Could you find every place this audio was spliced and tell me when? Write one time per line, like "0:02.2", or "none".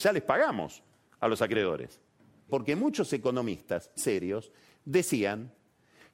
0:02.5
0:04.0